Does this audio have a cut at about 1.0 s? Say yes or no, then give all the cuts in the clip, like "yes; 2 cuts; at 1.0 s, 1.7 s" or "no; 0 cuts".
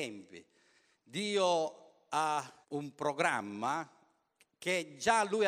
no; 1 cut; at 2.6 s